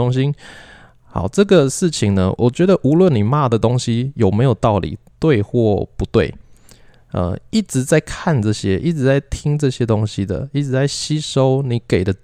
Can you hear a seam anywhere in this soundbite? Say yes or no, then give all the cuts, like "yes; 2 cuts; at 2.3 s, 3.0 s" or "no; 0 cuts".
yes; 1 cut; at 2.4 s